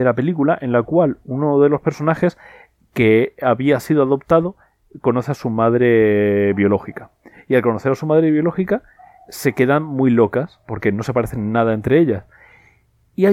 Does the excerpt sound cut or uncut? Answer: uncut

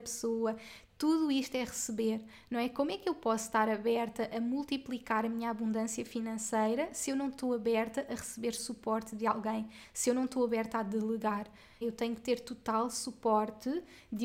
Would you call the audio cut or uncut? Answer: cut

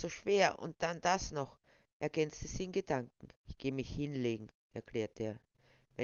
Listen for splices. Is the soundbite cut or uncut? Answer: cut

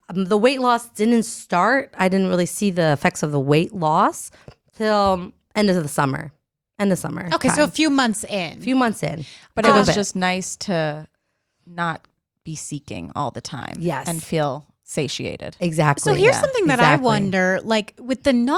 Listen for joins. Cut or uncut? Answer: uncut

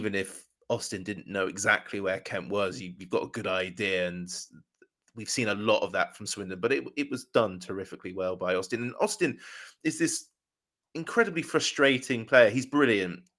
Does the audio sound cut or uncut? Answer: uncut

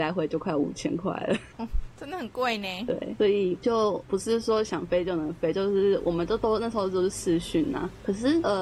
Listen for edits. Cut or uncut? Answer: uncut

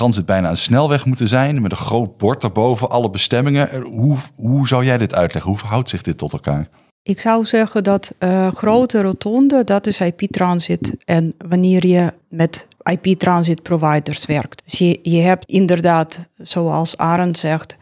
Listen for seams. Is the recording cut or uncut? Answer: uncut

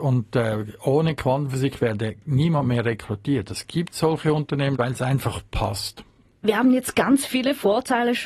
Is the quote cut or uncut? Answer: uncut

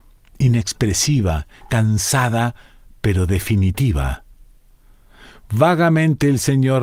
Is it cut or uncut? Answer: uncut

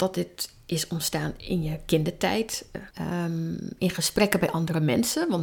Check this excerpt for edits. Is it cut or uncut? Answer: cut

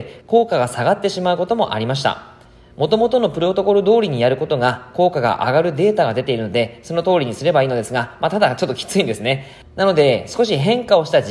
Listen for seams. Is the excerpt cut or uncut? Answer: uncut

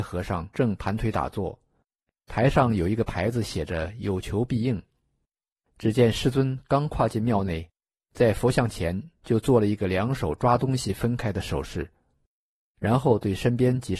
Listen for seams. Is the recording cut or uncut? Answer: cut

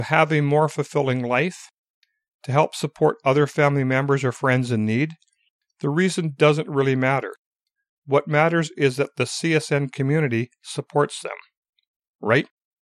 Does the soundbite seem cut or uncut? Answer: uncut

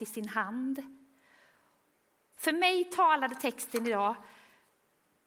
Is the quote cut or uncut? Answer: cut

